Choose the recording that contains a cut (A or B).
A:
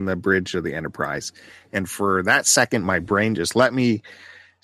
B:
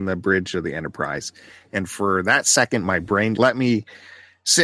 B